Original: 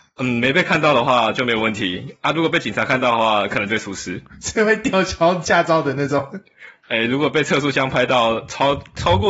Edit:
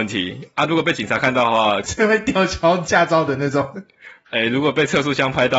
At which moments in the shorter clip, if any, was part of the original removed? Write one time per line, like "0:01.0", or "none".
0:01.8